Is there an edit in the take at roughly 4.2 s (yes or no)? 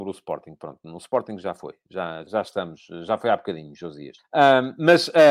yes